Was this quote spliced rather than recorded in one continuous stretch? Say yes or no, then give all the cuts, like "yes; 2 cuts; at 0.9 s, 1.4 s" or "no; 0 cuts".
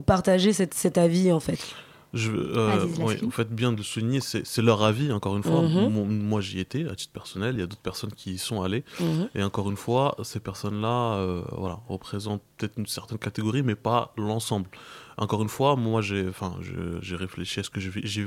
no; 0 cuts